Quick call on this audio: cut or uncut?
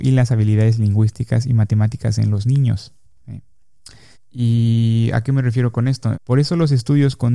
cut